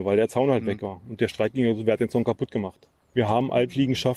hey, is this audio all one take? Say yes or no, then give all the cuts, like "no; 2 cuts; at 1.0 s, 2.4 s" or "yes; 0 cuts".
no; 1 cut; at 3.1 s